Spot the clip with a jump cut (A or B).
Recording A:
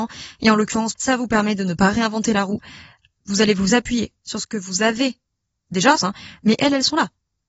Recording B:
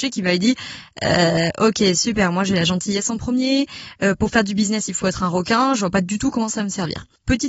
A